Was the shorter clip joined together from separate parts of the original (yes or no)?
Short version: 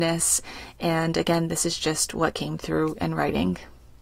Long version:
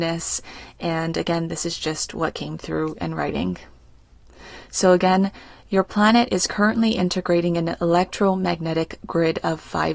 no